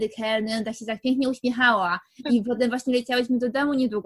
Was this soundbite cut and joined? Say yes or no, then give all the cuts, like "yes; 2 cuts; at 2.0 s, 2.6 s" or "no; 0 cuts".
yes; 1 cut; at 2.2 s